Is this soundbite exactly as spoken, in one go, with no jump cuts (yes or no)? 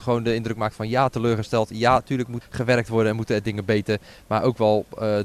no